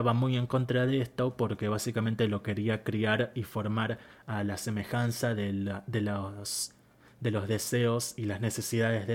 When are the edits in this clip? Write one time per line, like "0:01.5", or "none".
none